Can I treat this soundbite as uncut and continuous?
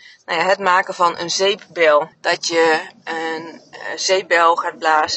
no; 1 cut; at 2.1 s

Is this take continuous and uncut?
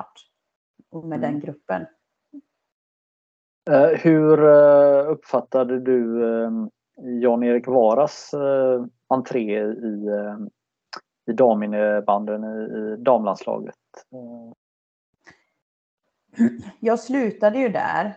yes; 0 cuts

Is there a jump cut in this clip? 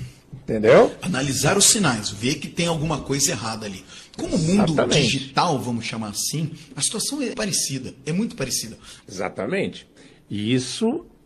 yes; 2 cuts; at 7.3 s, 9.0 s

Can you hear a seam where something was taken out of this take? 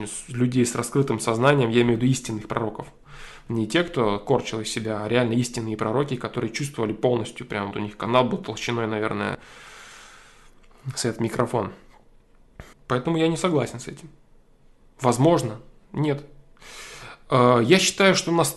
yes; 2 cuts; at 7.7 s, 12.7 s

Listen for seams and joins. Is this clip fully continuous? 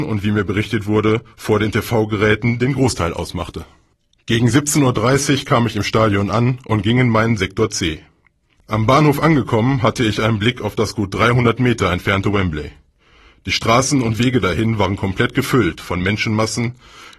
no; 1 cut; at 8.5 s

